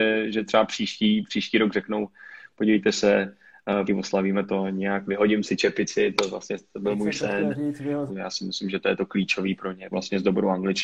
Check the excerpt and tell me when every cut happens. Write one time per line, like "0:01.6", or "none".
0:03.9
0:08.1
0:09.9

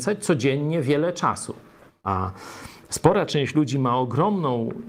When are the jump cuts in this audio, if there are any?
0:01.9

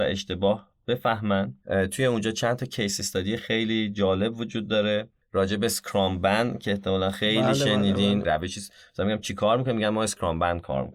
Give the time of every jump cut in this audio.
0:08.2

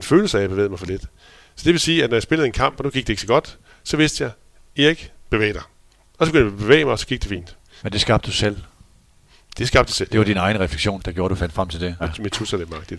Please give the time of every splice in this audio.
0:07.8
0:11.0
0:12.0

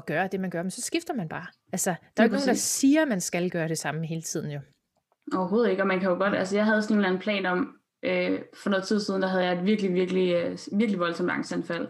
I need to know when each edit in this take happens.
none

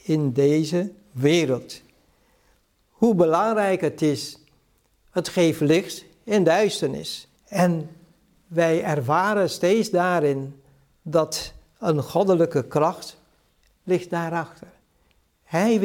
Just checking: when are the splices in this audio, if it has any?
0:07.4

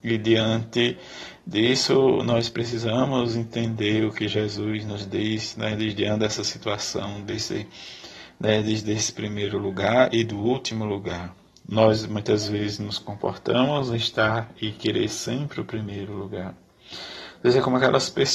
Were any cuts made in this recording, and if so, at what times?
none

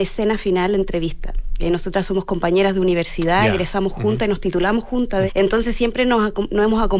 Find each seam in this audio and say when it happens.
0:05.3

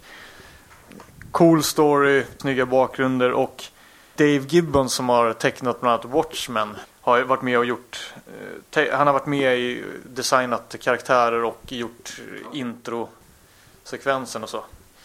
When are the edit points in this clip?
0:02.4
0:04.2

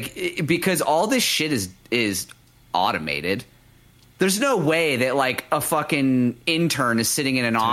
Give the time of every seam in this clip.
none

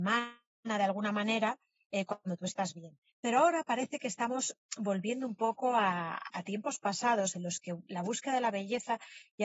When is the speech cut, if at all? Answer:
0:03.1
0:06.3

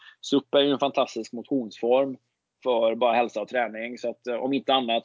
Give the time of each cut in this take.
none

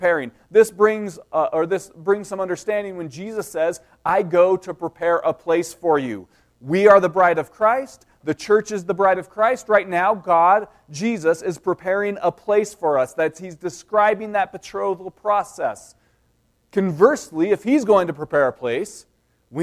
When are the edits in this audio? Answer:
none

